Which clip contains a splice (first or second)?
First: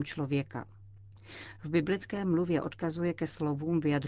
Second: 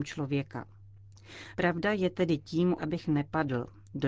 second